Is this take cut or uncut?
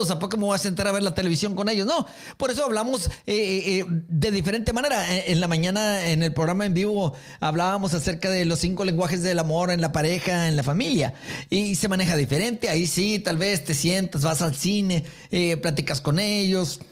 uncut